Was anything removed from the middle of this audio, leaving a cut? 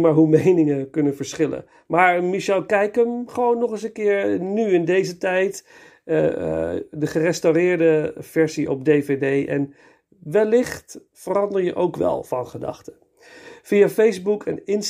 no; 0 cuts

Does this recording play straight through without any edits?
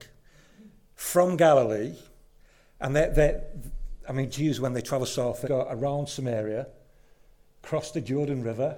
no; 1 cut; at 5.4 s

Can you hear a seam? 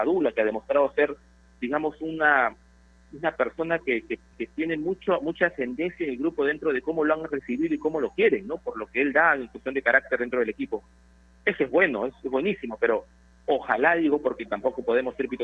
yes; 1 cut; at 4.3 s

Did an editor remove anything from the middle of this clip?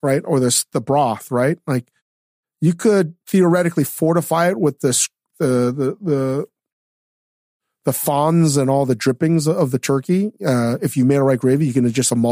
no; 0 cuts

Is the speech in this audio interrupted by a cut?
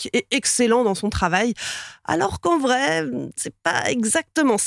no; 0 cuts

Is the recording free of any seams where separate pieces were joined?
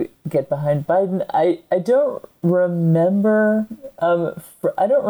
yes; 0 cuts

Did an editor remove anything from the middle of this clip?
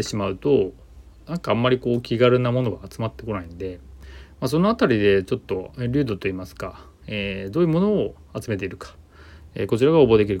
no; 0 cuts

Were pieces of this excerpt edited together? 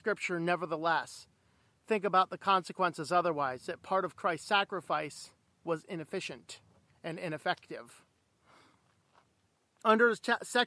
no; 0 cuts

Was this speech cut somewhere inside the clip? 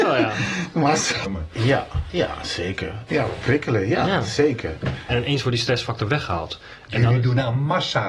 yes; 3 cuts; at 1.2 s, 3.1 s, 5.1 s

